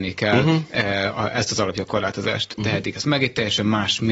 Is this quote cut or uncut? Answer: cut